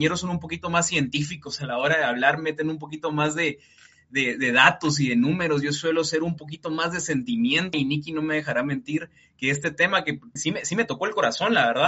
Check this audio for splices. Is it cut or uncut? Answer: cut